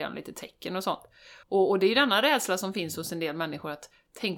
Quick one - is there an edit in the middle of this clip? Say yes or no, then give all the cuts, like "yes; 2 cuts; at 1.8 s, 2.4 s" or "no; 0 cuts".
yes; 1 cut; at 1.4 s